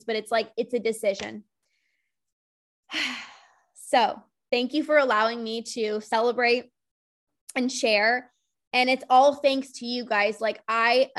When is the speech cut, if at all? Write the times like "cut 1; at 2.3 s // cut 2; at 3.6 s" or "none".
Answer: none